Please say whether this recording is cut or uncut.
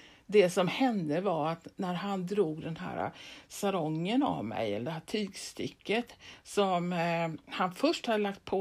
uncut